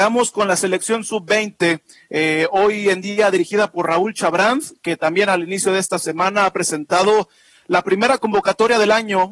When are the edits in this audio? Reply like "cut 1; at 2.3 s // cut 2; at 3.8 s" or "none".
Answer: none